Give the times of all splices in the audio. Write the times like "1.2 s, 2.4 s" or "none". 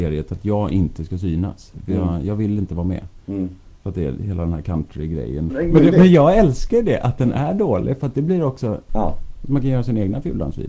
3.8 s, 5.5 s, 8.9 s